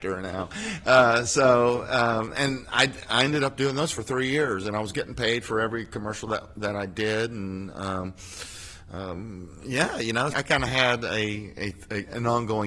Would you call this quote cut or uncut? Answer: cut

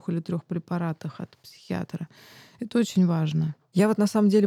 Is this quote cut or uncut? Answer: uncut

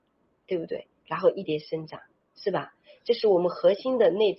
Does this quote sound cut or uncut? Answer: cut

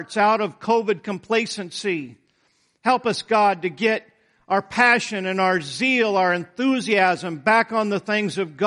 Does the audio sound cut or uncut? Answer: uncut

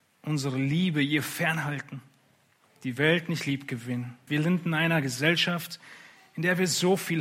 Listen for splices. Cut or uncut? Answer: cut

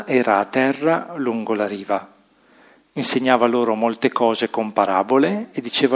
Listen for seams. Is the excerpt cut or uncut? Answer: uncut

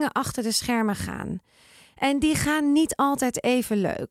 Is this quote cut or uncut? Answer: uncut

